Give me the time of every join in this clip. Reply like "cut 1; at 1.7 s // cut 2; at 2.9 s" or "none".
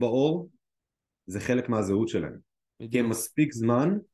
none